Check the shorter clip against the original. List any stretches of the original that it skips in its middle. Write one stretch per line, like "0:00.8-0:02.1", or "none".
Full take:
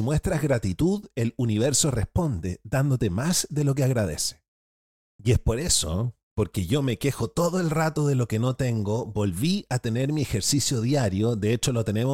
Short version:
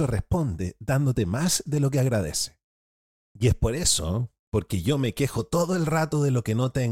none